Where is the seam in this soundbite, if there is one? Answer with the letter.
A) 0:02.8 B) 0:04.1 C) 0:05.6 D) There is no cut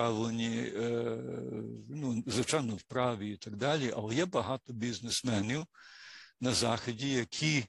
A